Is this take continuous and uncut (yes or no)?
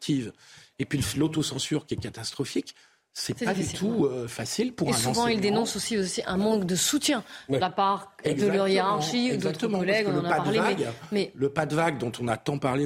yes